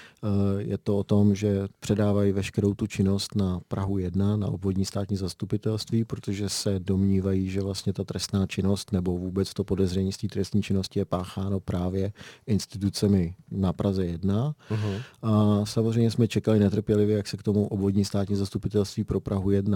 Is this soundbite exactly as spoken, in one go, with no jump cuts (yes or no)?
yes